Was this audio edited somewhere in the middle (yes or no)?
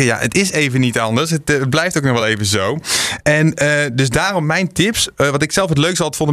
no